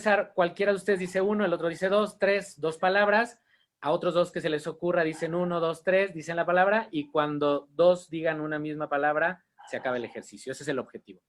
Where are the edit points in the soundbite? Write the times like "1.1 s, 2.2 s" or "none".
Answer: none